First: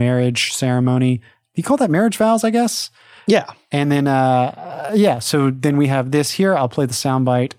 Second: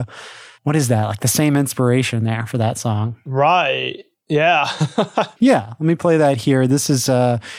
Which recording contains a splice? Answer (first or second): second